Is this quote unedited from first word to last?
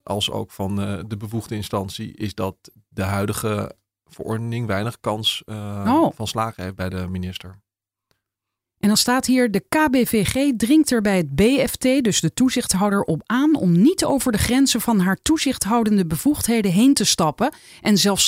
yes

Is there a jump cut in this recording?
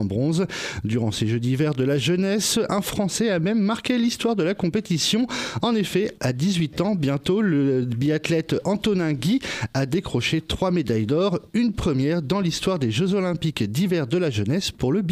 no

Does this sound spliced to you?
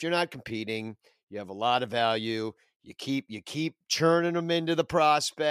no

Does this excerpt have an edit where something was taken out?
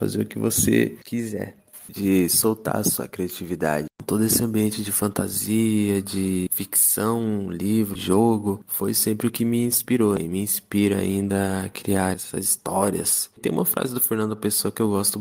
yes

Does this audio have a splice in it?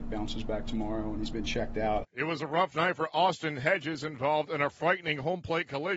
yes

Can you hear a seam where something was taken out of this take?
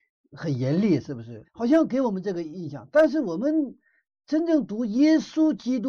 yes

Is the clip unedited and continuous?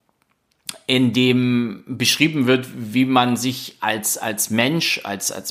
yes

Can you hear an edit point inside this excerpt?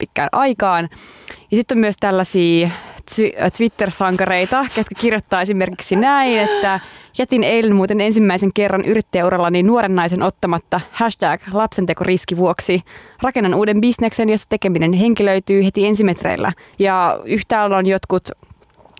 yes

